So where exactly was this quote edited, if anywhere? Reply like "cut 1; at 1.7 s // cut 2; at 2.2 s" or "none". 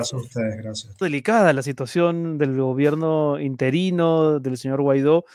cut 1; at 1.0 s

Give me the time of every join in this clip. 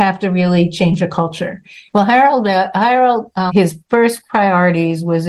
cut 1; at 1.9 s // cut 2; at 3.5 s

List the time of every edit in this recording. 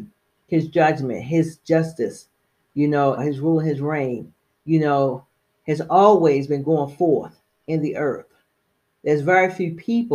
cut 1; at 3.2 s

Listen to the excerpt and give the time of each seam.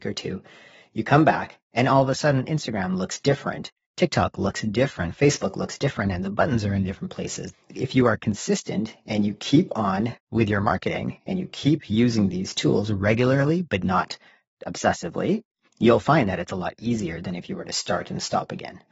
cut 1; at 7.5 s

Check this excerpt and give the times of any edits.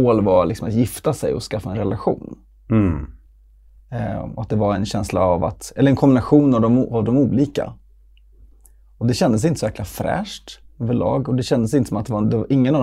none

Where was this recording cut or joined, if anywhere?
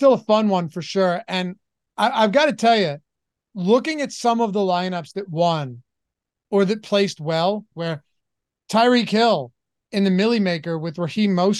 cut 1; at 7.7 s

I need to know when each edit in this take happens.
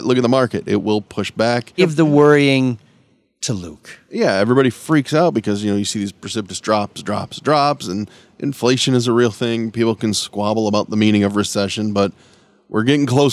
cut 1; at 1.8 s

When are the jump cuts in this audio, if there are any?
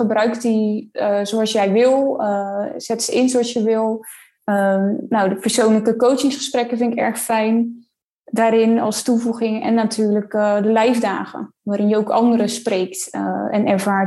none

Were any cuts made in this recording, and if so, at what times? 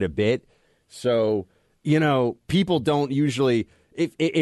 none

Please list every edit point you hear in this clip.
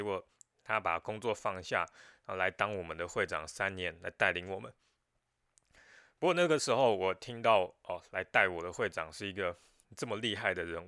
none

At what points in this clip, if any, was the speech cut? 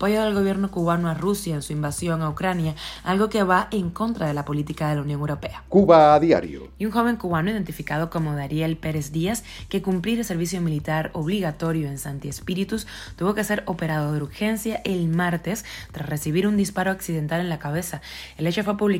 none

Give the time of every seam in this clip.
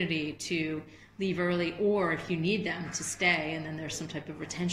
none

